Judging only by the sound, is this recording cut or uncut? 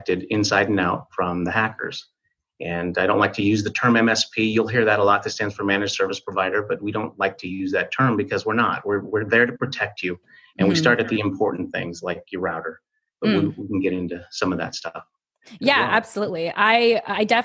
uncut